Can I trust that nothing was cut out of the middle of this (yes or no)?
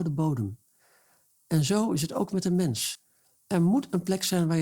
yes